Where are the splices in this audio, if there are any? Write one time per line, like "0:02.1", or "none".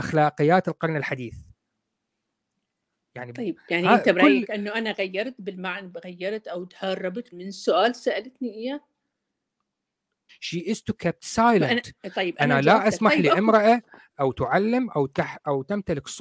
0:07.3
0:10.3